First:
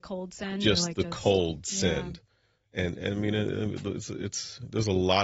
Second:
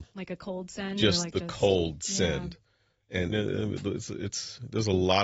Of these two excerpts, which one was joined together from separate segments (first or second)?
second